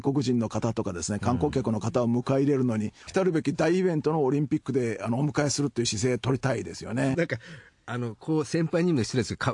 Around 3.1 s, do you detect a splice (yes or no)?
yes